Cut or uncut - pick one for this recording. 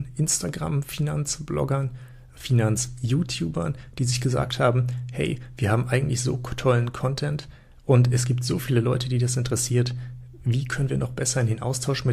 uncut